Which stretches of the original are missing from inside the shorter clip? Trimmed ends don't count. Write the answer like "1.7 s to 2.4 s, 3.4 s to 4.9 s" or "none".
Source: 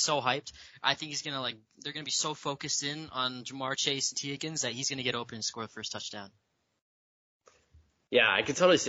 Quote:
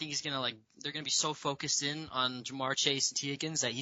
none